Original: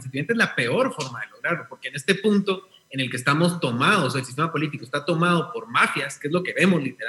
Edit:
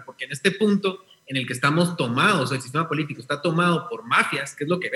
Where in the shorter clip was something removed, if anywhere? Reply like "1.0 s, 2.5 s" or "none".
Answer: none